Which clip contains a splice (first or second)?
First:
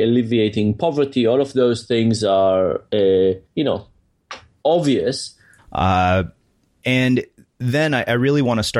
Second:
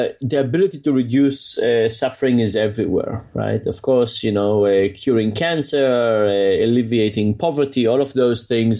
first